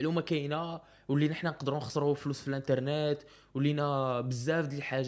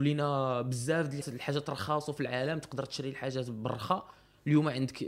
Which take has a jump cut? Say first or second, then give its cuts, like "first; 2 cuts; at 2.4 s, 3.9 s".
second; 1 cut; at 1.2 s